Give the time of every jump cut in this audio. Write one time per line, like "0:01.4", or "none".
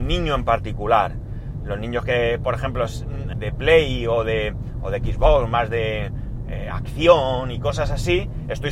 0:03.3

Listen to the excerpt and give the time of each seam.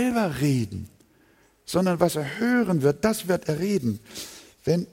none

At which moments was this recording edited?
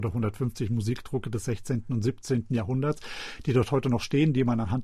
none

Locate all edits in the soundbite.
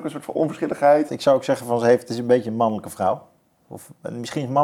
0:01.1

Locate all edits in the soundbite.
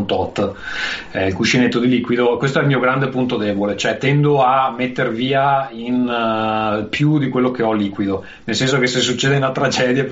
none

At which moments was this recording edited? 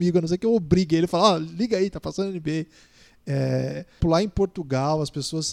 0:04.0

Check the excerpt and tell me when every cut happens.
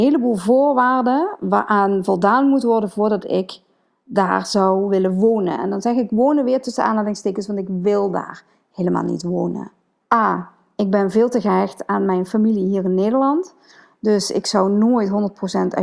0:10.0

